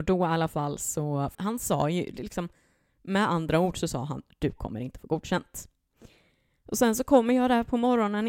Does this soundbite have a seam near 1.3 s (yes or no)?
yes